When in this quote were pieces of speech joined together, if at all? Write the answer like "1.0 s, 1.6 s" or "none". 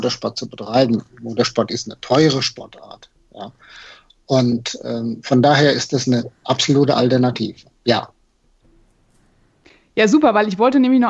none